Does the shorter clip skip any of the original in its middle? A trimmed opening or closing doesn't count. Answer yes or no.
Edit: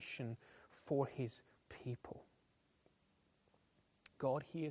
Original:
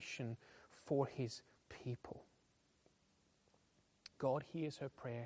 no